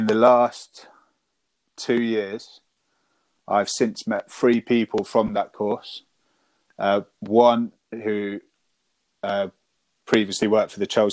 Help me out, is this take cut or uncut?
uncut